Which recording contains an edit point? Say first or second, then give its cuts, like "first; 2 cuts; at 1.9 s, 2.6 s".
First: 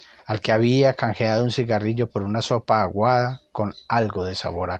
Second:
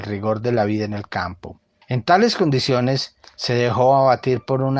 second; 2 cuts; at 1.8 s, 3.2 s